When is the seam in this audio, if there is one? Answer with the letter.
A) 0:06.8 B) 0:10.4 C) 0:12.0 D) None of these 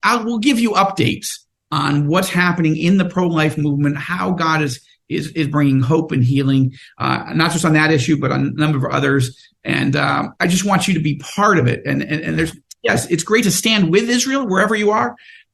D